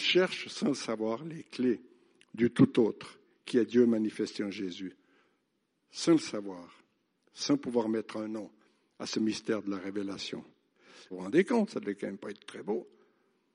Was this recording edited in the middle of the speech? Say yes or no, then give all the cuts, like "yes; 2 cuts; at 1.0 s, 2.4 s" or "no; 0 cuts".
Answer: yes; 1 cut; at 11.1 s